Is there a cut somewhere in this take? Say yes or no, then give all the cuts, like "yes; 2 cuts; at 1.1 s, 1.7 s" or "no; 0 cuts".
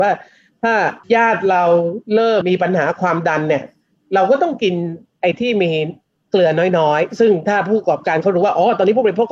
yes; 2 cuts; at 1.0 s, 2.4 s